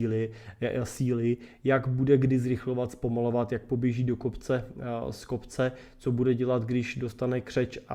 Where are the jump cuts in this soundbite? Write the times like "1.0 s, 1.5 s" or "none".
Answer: none